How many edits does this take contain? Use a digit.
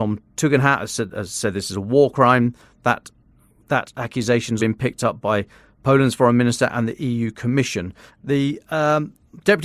2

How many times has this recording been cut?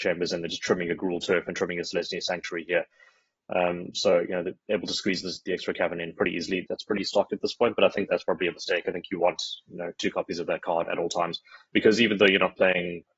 1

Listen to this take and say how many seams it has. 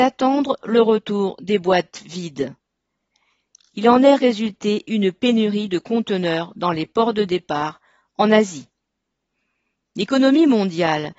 0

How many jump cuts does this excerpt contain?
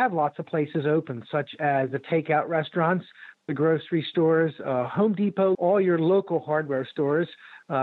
1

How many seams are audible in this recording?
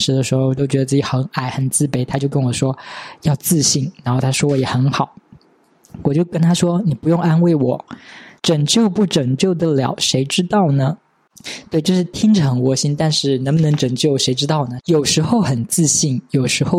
2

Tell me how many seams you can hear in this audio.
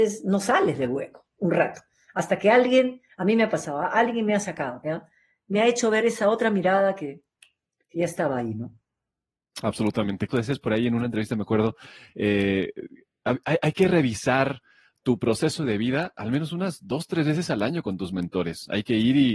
1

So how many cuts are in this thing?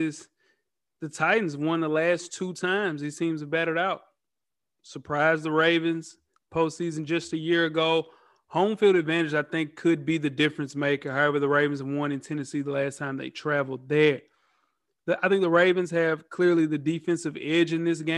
0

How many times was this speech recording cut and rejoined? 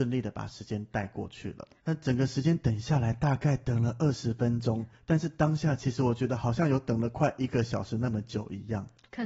1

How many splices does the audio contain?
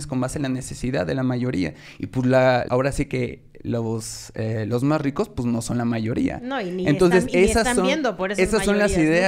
1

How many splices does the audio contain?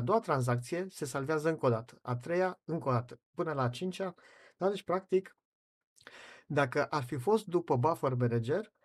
0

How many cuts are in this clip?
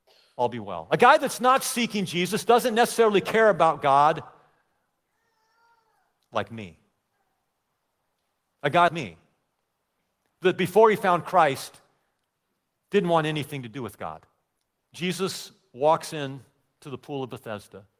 2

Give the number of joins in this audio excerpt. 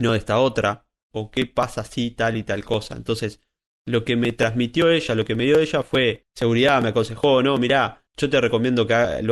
1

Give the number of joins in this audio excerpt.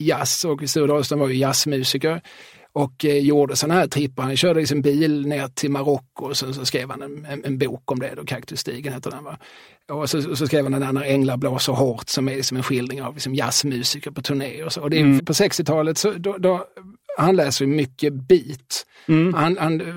1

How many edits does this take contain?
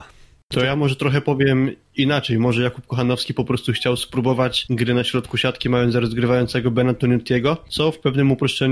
0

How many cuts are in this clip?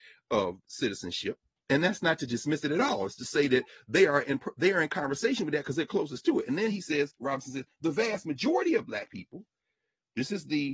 0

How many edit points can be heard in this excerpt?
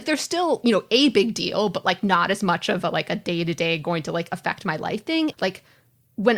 1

